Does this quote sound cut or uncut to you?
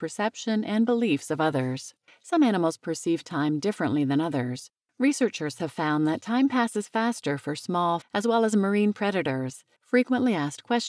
cut